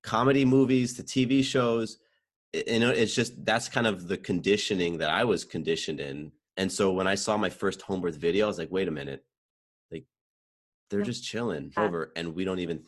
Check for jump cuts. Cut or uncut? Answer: cut